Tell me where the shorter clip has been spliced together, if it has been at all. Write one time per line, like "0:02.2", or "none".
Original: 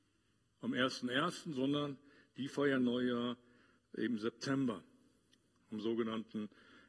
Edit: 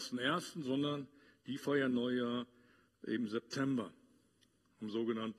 none

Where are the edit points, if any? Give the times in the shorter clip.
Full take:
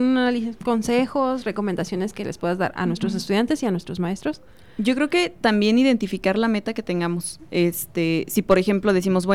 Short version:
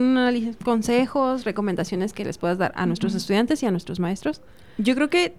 none

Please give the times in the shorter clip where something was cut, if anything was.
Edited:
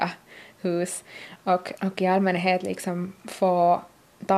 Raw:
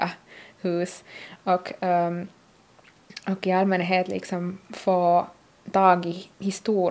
0:01.8

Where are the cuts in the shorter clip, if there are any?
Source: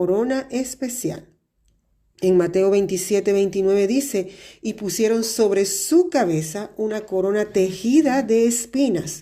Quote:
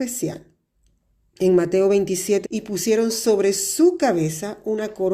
0:02.4

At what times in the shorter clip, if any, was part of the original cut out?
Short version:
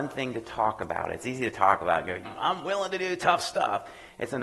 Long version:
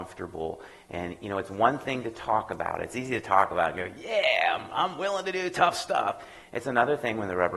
0:02.2

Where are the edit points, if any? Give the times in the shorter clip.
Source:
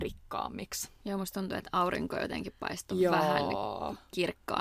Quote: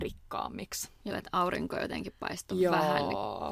0:01.1

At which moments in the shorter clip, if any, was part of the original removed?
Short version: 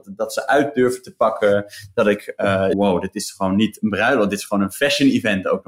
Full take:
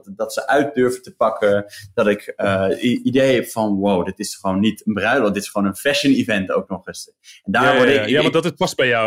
0:02.7

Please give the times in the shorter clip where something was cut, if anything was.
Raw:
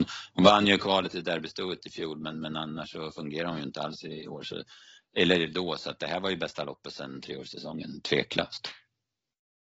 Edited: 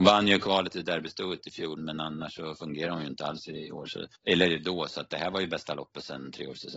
0:01.8
0:04.2

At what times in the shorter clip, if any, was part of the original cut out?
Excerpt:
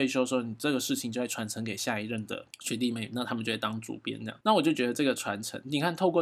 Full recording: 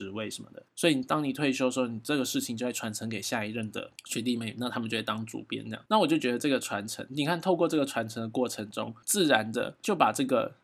none

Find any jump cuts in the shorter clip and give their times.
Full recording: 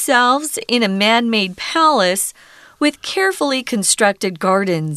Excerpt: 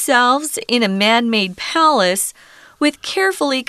none

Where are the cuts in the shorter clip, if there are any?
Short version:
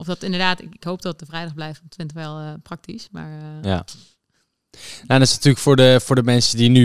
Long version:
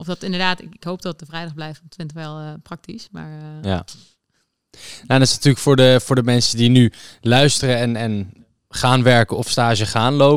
none

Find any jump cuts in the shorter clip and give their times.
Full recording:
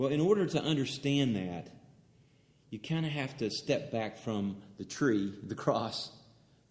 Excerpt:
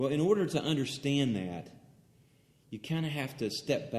none

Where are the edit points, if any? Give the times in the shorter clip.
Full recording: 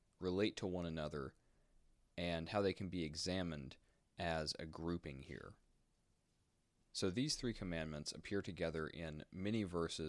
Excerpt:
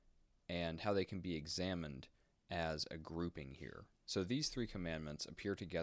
0:03.9

